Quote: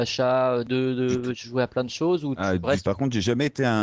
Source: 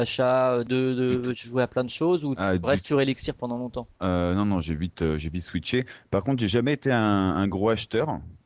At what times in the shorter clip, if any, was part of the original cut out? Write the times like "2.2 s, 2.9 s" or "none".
2.8 s